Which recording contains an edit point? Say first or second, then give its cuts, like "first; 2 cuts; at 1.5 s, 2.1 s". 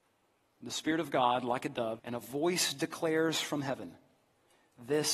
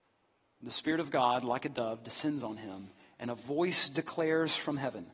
first; 1 cut; at 2.0 s